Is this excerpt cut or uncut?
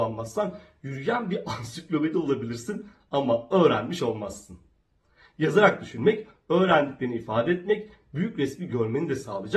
uncut